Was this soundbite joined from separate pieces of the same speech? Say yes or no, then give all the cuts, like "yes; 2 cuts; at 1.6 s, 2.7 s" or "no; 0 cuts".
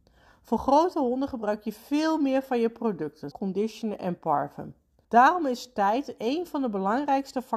yes; 2 cuts; at 3.3 s, 5.0 s